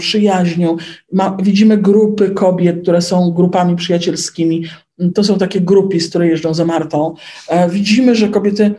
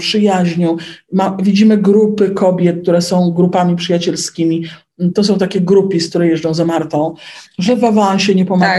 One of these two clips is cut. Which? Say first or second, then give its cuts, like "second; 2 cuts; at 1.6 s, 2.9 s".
second; 1 cut; at 7.4 s